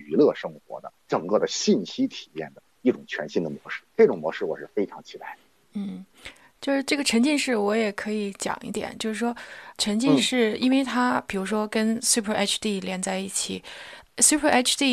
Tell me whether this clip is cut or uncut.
uncut